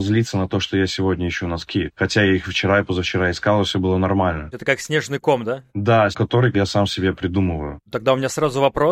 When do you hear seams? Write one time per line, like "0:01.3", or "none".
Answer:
0:06.1